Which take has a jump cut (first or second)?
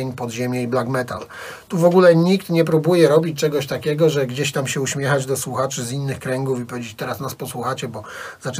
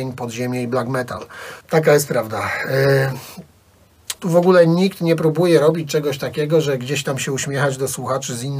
second